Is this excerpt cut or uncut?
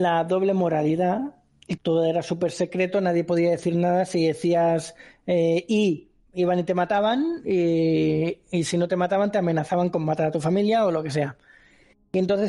cut